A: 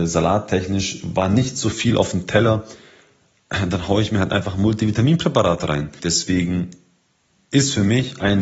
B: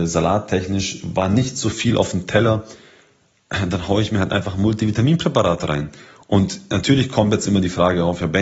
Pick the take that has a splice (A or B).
A